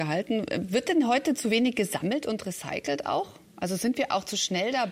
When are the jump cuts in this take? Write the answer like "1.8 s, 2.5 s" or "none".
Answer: none